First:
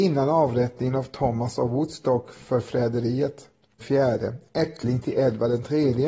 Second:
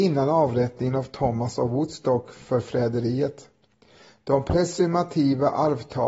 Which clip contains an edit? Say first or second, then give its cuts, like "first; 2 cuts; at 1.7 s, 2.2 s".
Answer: first; 1 cut; at 3.8 s